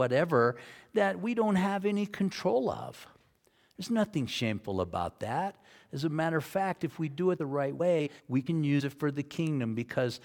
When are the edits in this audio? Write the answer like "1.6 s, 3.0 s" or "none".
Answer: none